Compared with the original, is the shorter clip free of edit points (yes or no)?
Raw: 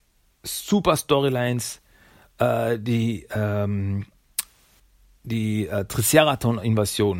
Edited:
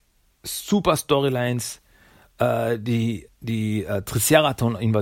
no